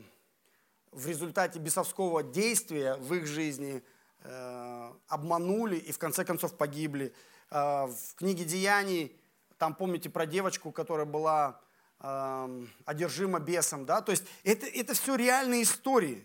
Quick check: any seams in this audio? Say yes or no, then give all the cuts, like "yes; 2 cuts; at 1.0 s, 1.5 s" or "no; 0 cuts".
yes; 1 cut; at 5.0 s